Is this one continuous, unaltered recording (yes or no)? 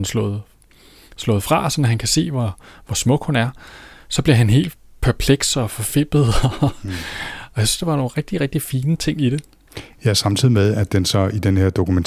yes